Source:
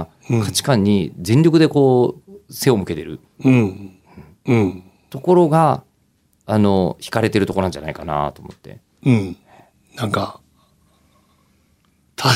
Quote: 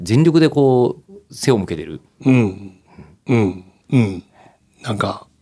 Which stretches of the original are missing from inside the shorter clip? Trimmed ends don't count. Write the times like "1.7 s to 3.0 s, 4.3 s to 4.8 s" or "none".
5.0 s to 8.9 s